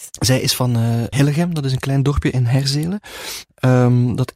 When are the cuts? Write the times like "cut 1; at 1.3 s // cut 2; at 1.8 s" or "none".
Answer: cut 1; at 1.1 s